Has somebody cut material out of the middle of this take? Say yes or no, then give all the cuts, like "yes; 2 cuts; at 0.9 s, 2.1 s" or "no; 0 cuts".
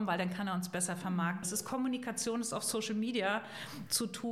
yes; 1 cut; at 1.4 s